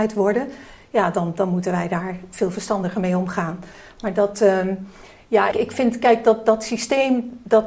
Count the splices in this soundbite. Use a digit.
1